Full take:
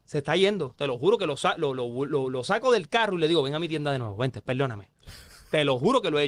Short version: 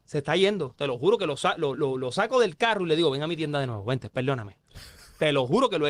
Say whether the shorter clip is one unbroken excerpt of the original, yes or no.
no